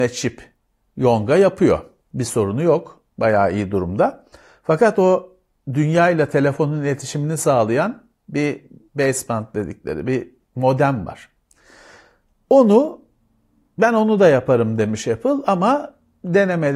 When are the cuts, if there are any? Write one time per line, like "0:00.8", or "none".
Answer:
none